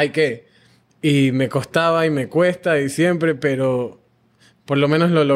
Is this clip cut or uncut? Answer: uncut